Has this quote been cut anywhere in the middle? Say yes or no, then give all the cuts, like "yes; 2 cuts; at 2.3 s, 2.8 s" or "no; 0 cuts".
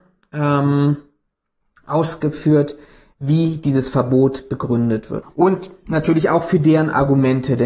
yes; 1 cut; at 5.2 s